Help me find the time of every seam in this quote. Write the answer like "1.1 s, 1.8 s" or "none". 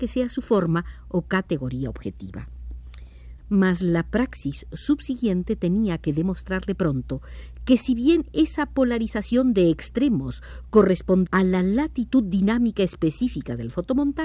3.4 s, 11.3 s